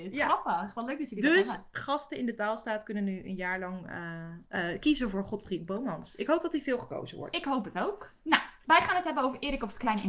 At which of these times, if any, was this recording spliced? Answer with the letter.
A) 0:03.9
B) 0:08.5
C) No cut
C